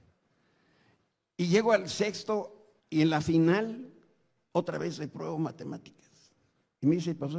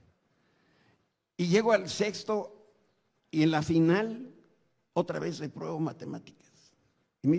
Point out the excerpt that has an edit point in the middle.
first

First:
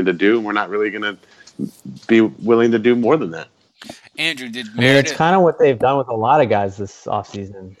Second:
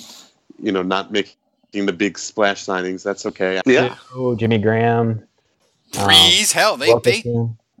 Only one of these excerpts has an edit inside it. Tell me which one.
second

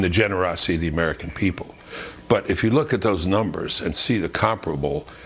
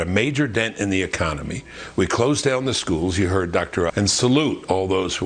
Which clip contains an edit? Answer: second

